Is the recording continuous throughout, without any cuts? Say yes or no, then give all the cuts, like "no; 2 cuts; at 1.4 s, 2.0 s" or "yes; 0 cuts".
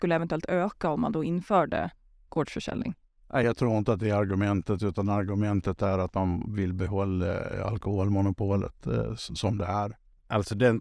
yes; 0 cuts